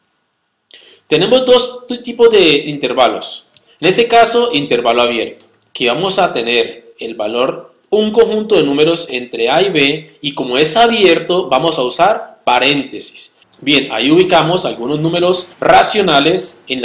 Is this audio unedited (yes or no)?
no